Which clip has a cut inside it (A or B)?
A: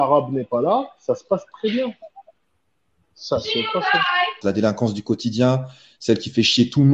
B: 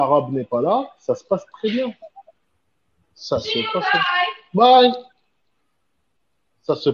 A